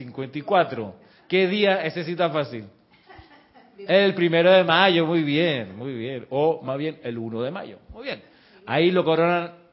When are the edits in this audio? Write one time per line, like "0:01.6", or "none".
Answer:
0:03.9